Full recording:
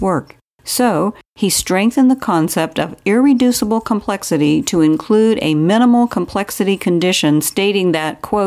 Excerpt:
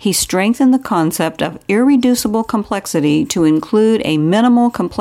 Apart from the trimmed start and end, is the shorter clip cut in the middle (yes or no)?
no